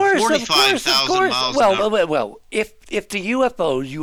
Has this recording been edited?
no; 0 cuts

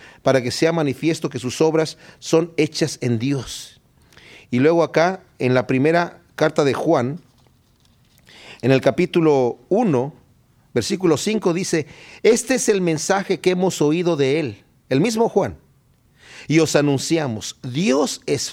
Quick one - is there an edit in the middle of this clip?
no; 0 cuts

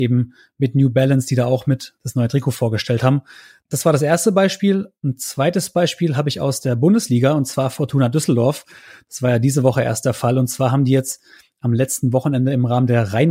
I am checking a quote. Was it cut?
no; 0 cuts

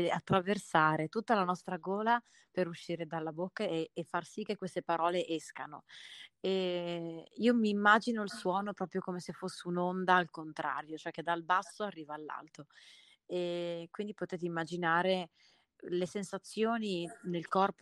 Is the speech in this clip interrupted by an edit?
no; 0 cuts

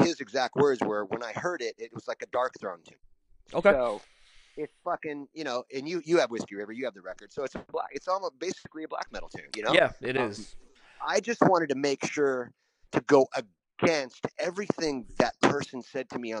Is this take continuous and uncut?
yes; 0 cuts

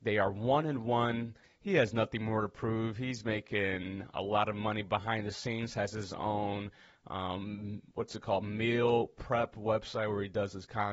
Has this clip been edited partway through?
yes; 1 cut; at 1.4 s

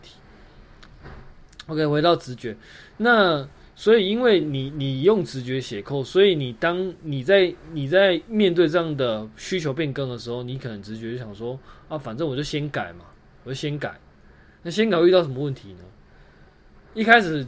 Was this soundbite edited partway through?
no; 0 cuts

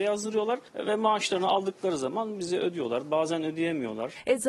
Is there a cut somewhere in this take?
no; 0 cuts

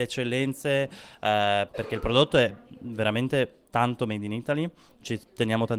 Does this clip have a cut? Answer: yes; 1 cut; at 1.7 s

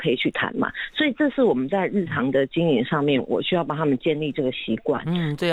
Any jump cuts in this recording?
no; 0 cuts

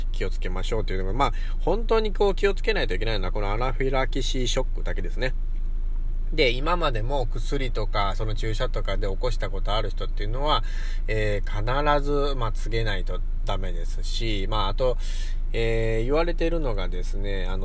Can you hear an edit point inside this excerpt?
no; 0 cuts

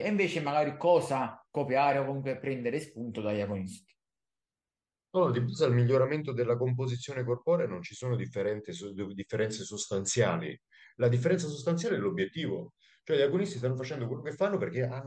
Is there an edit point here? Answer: yes; 1 cut; at 1.4 s

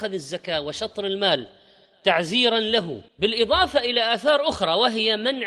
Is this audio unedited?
no; 1 cut; at 3.1 s

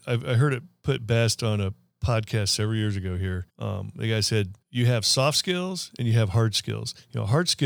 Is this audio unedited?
no; 2 cuts; at 3.5 s, 4.6 s

